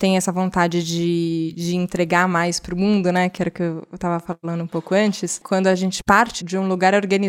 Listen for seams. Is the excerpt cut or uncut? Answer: uncut